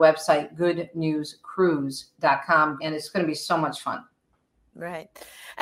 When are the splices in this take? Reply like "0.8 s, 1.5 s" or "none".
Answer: 2.8 s